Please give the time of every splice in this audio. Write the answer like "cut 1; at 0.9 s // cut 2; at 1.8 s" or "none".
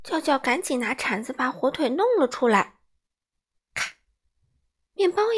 none